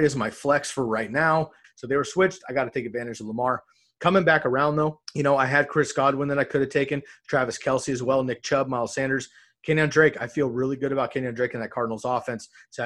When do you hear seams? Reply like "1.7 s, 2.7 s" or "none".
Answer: 1.6 s, 5.0 s